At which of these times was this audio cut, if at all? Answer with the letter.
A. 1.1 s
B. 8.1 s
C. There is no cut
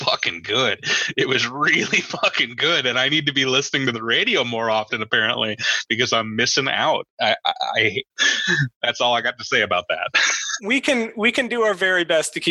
B